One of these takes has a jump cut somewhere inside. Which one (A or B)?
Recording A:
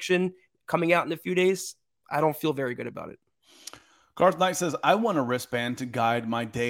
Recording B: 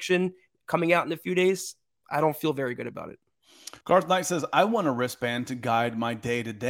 B